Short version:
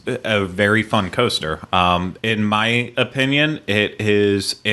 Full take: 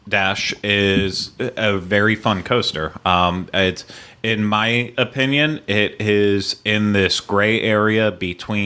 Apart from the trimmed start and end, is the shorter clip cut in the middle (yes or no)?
yes